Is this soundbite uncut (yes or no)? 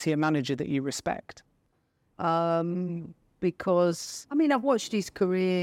yes